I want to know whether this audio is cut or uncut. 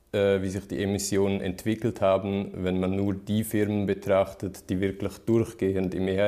uncut